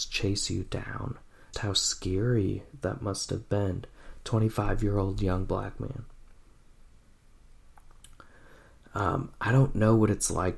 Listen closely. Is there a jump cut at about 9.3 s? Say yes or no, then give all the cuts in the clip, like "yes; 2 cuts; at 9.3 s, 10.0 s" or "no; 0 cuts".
no; 1 cut; at 1.5 s